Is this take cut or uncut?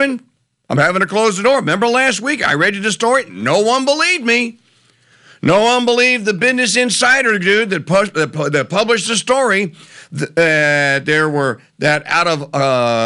uncut